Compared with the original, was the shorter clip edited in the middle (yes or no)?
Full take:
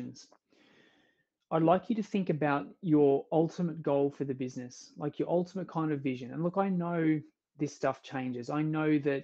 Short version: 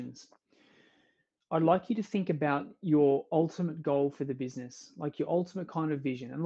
no